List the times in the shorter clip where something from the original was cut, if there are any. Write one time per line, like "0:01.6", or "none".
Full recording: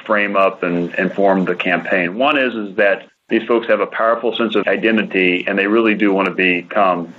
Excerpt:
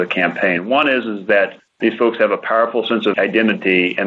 none